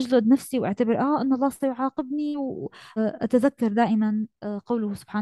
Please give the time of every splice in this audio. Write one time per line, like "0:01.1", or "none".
0:03.0